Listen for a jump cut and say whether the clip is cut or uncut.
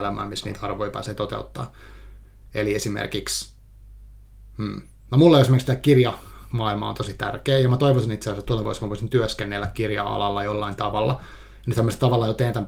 uncut